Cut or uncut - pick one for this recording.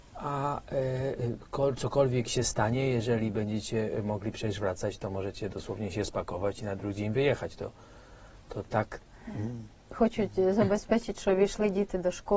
uncut